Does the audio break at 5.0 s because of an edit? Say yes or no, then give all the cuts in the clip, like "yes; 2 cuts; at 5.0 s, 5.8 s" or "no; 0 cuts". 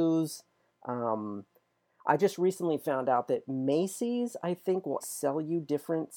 yes; 1 cut; at 5.0 s